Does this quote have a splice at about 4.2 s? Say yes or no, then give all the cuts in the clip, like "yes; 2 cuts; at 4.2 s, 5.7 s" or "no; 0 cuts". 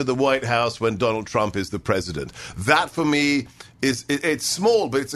no; 0 cuts